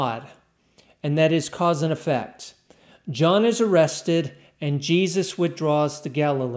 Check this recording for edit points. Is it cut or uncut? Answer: uncut